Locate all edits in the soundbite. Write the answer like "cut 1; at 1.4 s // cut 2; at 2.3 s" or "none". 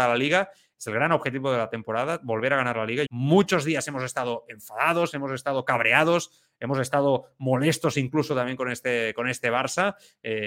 cut 1; at 3.1 s